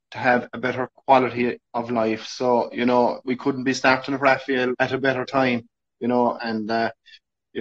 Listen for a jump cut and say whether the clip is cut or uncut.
cut